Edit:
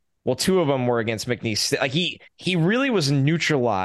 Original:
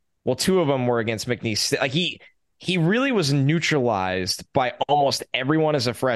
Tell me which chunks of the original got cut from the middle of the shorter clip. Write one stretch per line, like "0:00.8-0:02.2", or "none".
0:02.3-0:02.5